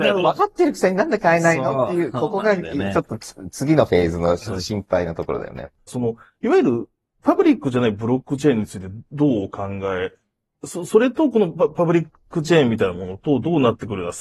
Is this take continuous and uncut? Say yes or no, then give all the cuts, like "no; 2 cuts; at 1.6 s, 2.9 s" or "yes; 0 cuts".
no; 1 cut; at 5.9 s